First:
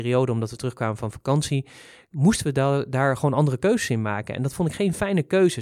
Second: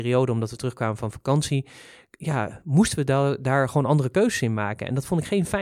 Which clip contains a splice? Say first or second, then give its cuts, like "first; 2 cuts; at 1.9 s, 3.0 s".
first; 1 cut; at 2.1 s